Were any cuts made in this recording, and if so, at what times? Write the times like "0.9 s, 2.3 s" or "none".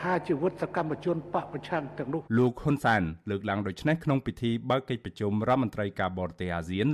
2.3 s